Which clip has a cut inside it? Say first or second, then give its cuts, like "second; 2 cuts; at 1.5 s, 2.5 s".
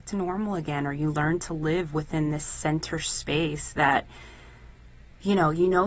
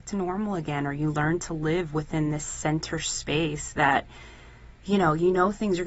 second; 1 cut; at 4.8 s